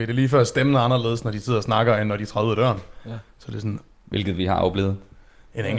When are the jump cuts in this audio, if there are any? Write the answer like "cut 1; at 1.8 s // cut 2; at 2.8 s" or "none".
none